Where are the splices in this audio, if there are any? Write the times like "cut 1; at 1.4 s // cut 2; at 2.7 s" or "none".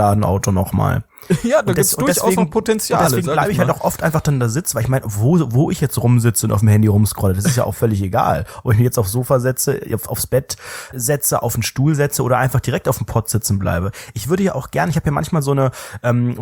cut 1; at 10.9 s